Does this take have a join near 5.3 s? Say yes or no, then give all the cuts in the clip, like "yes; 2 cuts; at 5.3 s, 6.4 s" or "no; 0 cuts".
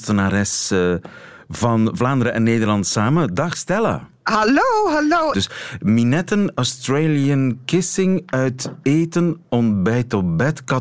yes; 1 cut; at 5.3 s